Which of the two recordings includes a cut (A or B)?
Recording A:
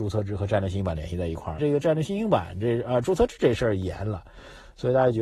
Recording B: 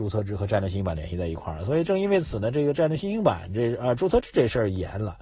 A